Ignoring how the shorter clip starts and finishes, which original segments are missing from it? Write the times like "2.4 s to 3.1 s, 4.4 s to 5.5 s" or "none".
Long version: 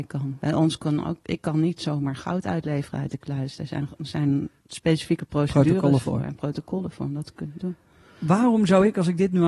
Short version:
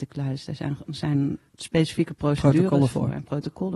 none